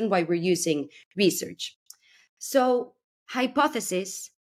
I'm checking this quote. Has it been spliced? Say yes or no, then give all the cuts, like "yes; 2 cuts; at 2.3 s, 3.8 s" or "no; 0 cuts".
no; 0 cuts